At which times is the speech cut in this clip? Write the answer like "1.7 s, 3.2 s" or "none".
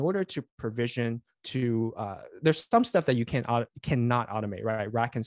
none